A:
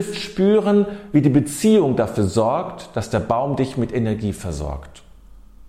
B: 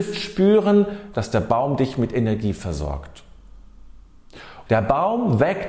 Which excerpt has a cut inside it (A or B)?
B